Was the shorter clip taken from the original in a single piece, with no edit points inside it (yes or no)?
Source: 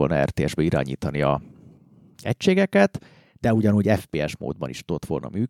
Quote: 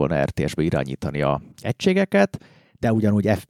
no